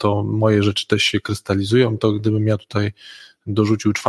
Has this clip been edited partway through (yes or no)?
no